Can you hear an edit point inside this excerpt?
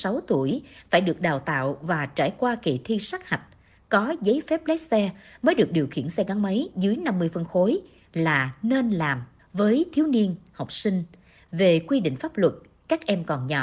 yes; 1 cut; at 9.4 s

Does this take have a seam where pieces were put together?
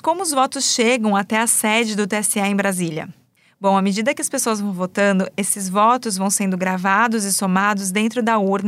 no; 0 cuts

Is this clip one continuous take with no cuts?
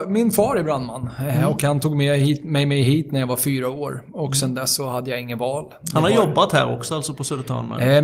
yes; 0 cuts

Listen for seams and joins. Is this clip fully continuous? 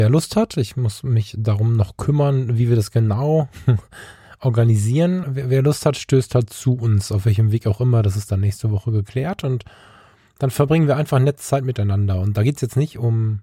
no; 1 cut; at 5.2 s

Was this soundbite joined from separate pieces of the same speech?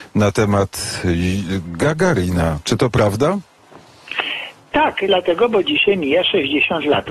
no; 0 cuts

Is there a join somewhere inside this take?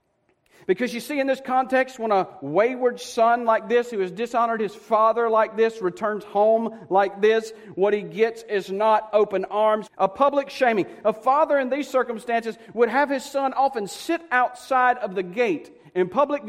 yes; 1 cut; at 9.9 s

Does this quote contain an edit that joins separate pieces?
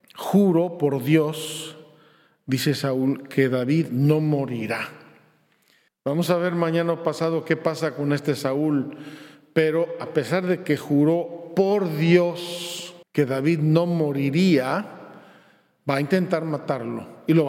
yes; 2 cuts; at 5.9 s, 13.0 s

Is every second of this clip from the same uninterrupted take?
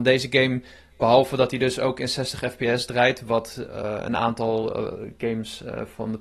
yes; 0 cuts

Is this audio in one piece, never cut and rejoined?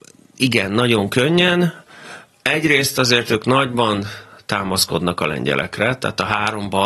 yes; 0 cuts

